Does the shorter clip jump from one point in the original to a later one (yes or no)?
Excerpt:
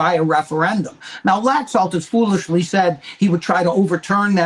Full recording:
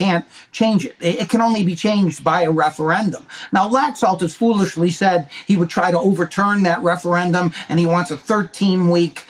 no